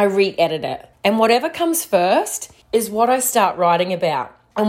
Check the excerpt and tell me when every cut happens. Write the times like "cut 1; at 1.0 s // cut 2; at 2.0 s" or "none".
cut 1; at 0.9 s // cut 2; at 2.6 s